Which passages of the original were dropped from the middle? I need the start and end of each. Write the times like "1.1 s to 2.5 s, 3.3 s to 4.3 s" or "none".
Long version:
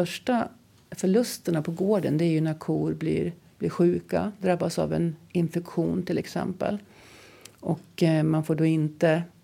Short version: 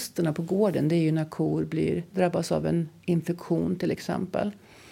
3.4 s to 4.4 s